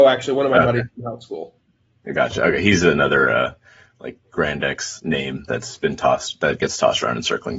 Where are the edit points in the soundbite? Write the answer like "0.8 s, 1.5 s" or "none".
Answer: none